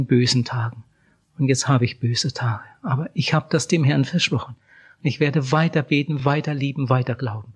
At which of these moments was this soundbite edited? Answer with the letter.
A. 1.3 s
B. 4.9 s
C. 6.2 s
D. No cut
D